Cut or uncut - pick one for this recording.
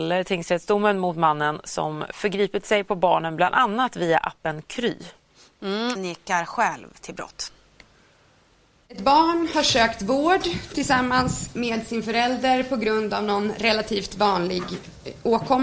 cut